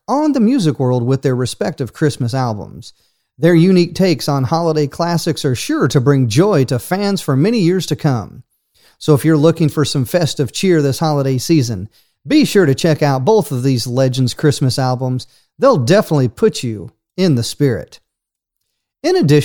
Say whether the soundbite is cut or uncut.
uncut